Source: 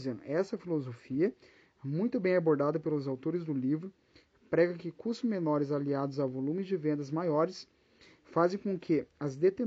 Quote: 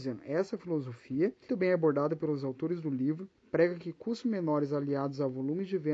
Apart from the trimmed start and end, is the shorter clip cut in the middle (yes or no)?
yes